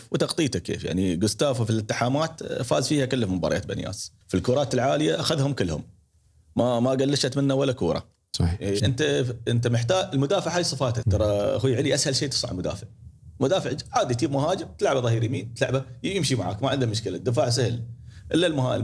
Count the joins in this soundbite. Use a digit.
3